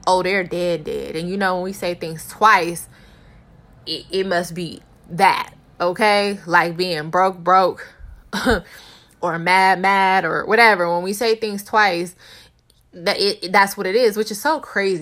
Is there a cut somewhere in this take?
no; 0 cuts

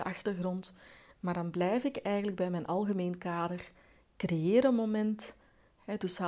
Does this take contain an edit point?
no; 0 cuts

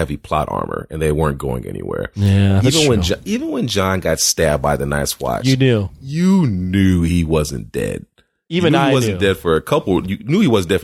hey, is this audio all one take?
yes; 0 cuts

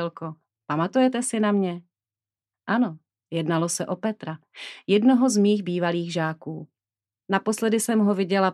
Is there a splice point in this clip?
no; 0 cuts

